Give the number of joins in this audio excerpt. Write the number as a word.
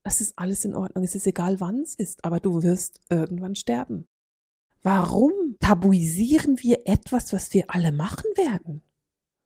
zero